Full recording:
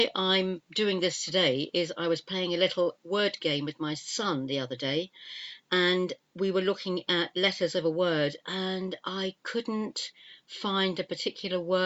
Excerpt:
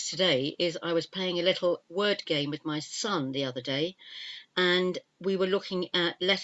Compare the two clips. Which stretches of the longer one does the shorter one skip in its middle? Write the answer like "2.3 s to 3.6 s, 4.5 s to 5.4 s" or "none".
none